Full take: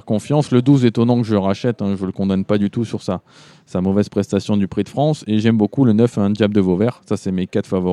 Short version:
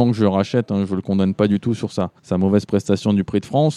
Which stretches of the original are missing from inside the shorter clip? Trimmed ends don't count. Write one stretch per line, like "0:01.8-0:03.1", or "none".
0:03.3-0:03.6

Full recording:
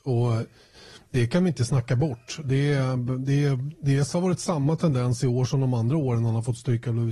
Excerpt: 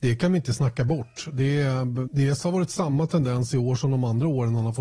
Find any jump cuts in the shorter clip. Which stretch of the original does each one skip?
0:03.2-0:03.8

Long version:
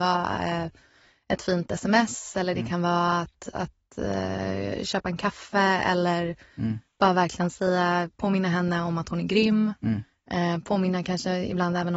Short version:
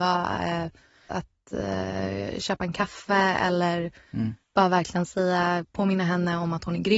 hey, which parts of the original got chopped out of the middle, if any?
0:01.1-0:03.5

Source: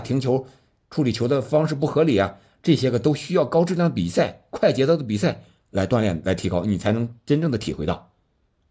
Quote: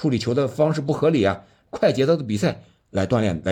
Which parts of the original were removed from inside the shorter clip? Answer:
0:02.6-0:04.5

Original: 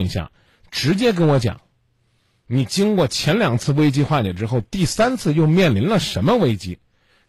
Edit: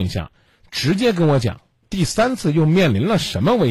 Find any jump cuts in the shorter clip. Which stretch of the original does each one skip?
0:01.8-0:04.6

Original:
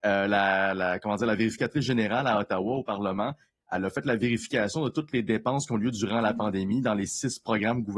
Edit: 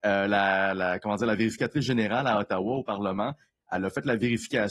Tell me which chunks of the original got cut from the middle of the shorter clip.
none

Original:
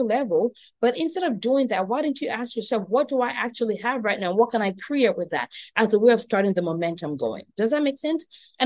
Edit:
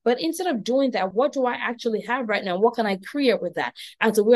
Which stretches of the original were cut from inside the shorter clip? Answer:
0:01.9-0:02.9

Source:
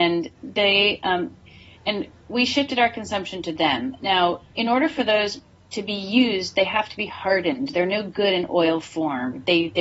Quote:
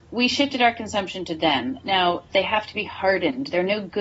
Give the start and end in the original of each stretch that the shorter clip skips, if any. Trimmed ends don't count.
0:04.5-0:06.5

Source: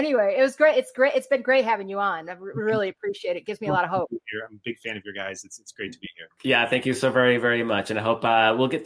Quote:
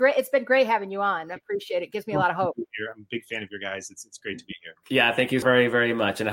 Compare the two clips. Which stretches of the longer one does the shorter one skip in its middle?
0:02.3-0:02.9
0:07.0-0:07.1

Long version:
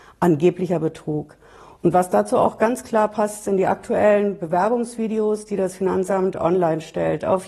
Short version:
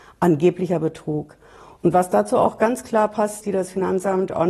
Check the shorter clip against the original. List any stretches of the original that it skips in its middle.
0:03.4-0:05.5

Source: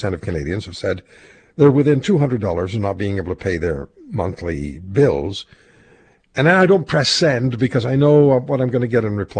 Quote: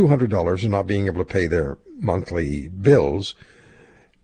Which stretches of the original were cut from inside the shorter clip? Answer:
none

